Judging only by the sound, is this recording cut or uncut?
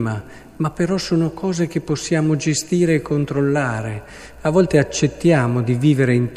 uncut